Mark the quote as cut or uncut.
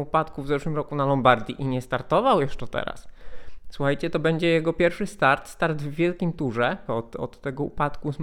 cut